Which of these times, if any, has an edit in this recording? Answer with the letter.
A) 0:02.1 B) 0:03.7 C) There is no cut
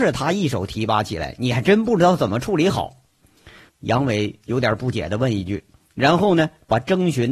B